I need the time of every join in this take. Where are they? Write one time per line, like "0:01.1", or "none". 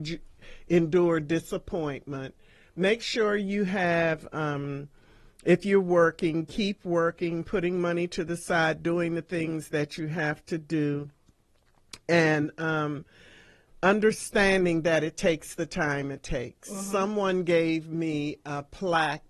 none